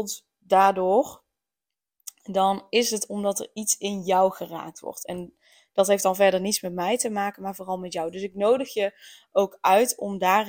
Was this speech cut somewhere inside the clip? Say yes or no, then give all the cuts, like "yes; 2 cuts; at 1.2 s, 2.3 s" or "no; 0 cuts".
no; 0 cuts